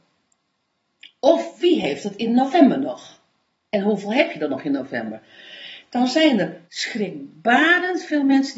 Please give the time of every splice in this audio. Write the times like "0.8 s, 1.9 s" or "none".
6.6 s